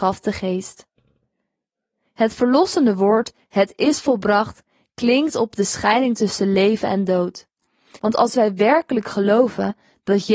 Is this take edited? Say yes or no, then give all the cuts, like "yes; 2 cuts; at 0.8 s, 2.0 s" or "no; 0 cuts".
yes; 1 cut; at 8.0 s